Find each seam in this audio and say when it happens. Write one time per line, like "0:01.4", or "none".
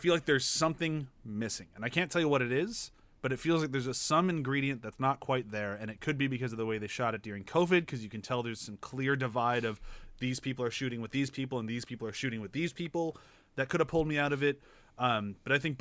none